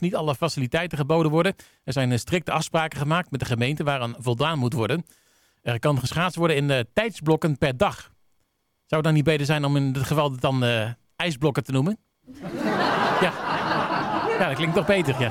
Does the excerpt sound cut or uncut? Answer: uncut